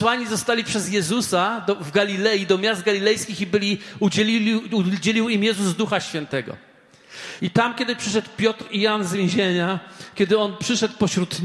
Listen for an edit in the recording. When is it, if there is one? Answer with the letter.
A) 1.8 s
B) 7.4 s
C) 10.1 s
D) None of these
B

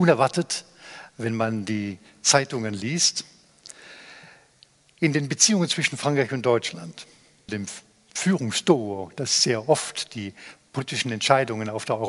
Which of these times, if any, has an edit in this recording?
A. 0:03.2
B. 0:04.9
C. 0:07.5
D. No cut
C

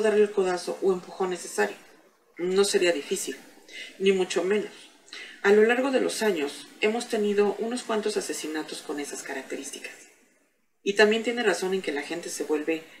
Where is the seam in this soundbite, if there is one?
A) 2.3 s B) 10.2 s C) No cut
A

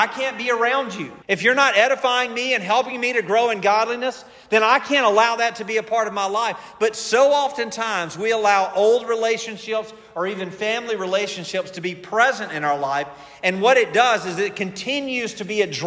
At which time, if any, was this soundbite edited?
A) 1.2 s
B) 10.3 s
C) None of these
A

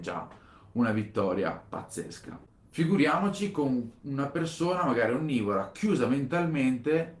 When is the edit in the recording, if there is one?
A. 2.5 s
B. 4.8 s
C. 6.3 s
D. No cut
A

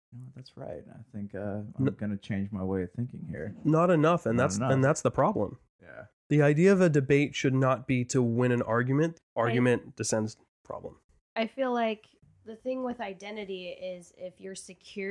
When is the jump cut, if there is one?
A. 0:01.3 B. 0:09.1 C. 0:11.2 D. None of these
B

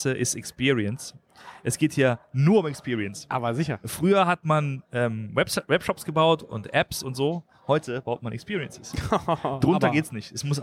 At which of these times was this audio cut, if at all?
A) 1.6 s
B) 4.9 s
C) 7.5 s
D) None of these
D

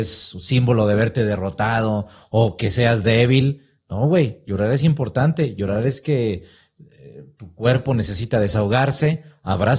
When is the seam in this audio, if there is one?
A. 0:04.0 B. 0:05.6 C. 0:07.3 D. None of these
D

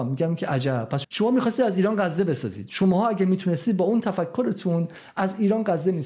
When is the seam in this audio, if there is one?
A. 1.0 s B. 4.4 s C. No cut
A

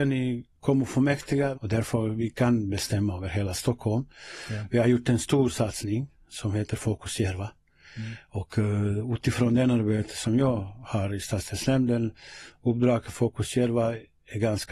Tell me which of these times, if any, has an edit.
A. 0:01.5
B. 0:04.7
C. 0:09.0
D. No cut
A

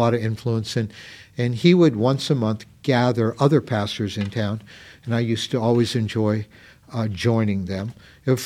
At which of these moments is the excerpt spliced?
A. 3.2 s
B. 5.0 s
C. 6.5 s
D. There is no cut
D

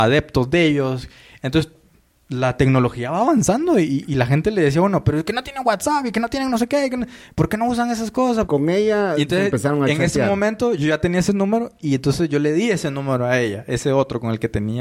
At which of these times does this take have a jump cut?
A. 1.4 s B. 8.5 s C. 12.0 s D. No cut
B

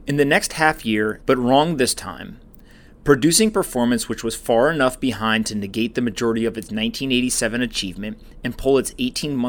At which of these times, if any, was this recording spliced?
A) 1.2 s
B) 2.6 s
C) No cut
A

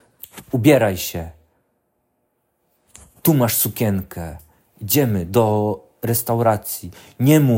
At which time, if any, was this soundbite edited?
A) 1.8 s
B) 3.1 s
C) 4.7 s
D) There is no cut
D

